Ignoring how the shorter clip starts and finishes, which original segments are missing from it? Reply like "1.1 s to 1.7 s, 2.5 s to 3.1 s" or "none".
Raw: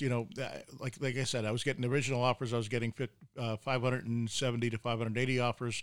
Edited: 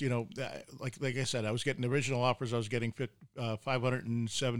none